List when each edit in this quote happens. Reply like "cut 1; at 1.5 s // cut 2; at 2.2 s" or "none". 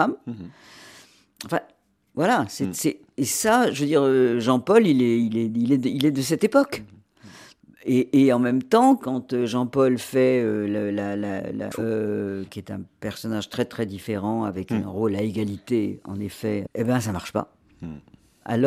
cut 1; at 11.7 s // cut 2; at 16.7 s